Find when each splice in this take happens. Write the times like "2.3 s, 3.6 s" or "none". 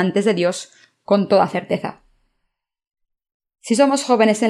none